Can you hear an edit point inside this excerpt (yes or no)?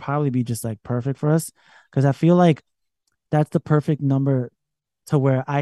no